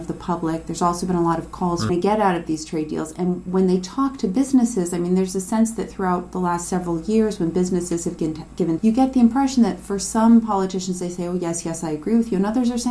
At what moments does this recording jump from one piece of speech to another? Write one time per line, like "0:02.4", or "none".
0:01.9
0:08.8